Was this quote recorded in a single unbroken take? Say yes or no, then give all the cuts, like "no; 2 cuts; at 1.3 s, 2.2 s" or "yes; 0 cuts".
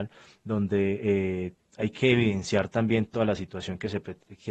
yes; 0 cuts